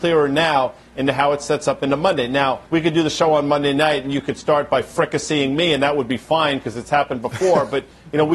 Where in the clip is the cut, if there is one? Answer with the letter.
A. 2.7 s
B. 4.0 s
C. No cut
A